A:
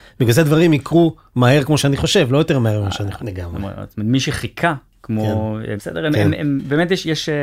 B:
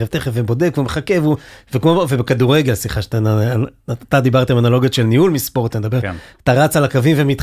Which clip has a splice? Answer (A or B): A